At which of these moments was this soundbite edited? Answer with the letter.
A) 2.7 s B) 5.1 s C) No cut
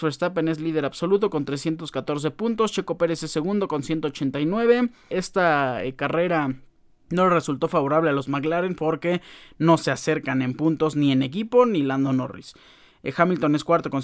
B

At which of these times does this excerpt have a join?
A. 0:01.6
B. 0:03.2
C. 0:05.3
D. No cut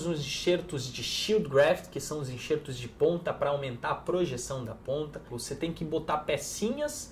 C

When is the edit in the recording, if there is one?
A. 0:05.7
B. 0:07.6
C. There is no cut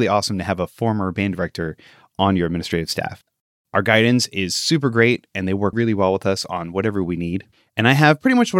A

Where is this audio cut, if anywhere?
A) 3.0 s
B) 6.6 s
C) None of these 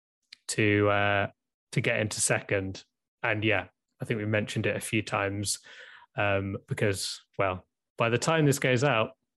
C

